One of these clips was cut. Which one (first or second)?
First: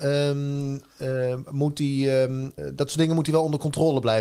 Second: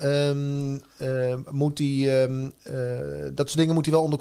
first